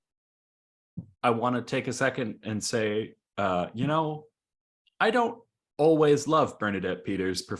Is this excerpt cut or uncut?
uncut